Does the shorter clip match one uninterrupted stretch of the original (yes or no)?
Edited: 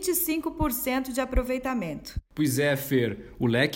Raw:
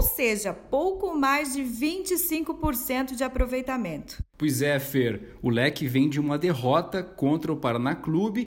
yes